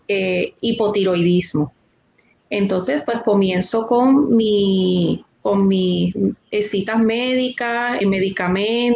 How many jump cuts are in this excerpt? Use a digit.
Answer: 2